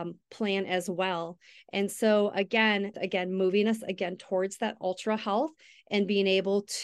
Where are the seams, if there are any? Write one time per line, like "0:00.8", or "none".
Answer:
0:02.9

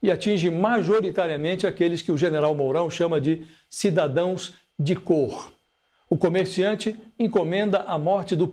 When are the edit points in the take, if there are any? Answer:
none

